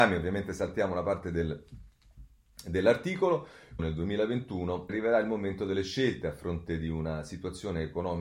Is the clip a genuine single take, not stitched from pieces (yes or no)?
no